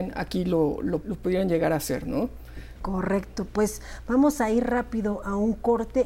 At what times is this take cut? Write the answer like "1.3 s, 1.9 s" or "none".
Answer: 1.0 s